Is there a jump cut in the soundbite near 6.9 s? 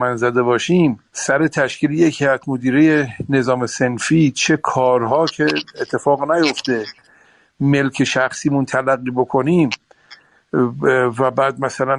no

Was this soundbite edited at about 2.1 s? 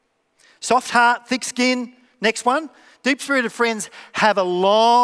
no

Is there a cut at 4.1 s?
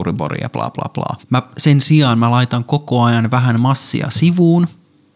no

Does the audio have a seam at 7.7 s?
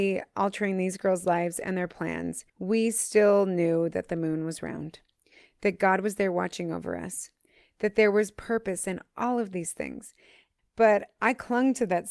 no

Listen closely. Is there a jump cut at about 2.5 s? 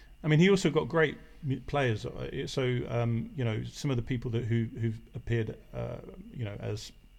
no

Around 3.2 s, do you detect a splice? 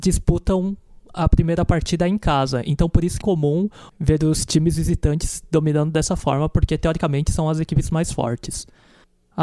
yes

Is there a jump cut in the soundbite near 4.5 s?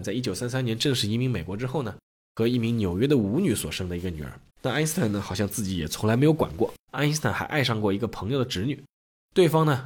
yes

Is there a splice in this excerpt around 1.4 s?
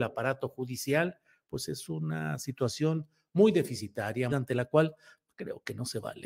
no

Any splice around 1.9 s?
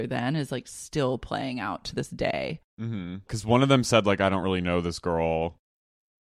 no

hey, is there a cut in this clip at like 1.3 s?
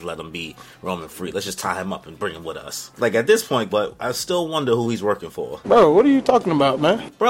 no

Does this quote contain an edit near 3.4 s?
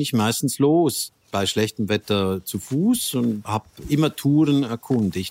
yes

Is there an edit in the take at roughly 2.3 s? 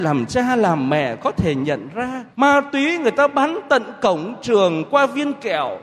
yes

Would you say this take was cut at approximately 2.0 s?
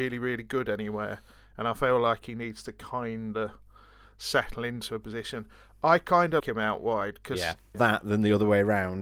no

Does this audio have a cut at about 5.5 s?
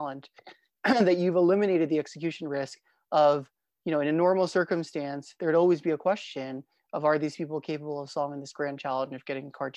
no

